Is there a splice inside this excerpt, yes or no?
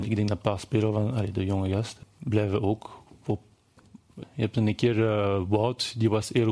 yes